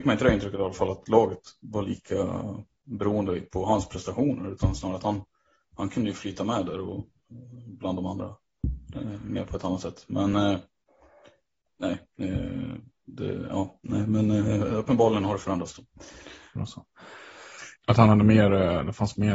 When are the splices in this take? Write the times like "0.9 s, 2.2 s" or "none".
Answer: 16.6 s, 17.8 s